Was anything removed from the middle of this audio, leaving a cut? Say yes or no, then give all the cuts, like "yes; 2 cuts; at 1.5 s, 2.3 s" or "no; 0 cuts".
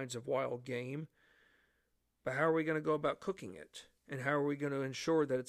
no; 0 cuts